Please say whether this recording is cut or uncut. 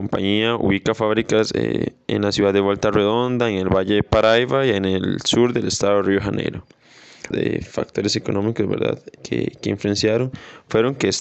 cut